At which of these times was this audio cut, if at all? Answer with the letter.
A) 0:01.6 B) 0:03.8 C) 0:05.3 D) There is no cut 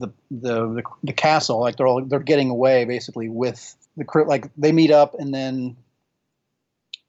B